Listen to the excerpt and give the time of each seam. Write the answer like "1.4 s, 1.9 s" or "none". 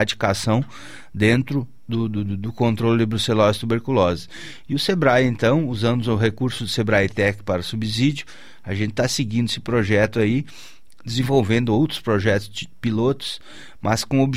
none